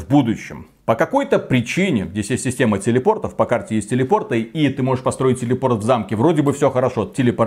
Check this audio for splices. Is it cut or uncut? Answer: uncut